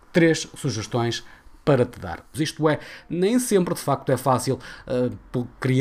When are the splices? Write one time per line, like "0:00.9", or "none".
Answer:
0:02.3